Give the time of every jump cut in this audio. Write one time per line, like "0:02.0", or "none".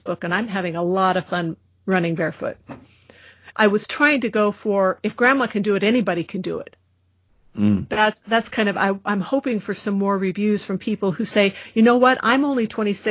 0:03.5